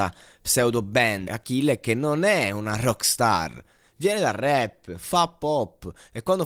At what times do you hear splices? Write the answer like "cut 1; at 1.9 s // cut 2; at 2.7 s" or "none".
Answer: cut 1; at 1.2 s